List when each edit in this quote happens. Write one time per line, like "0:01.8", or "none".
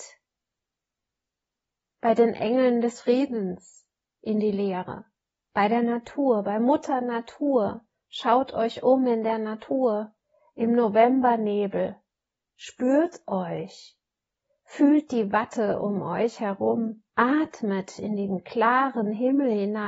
0:05.4
0:12.4
0:17.1